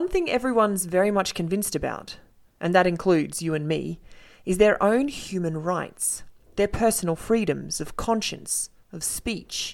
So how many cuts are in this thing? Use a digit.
0